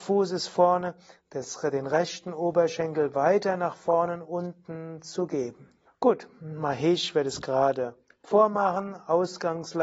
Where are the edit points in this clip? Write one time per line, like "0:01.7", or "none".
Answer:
0:05.9